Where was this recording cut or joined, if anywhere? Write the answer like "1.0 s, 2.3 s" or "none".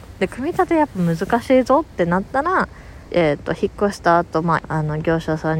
3.1 s, 4.6 s